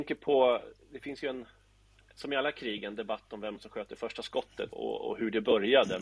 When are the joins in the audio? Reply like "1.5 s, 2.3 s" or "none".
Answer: 4.7 s